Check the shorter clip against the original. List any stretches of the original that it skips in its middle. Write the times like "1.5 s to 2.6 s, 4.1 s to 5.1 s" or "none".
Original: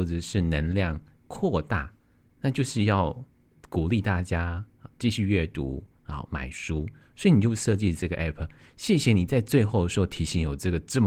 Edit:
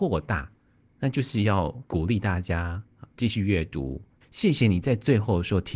3.3 s to 3.7 s, 6.0 s to 8.7 s